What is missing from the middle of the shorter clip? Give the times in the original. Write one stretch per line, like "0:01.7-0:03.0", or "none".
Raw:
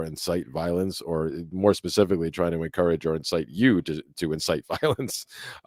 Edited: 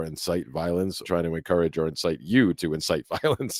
0:01.0-0:02.3
0:03.8-0:04.1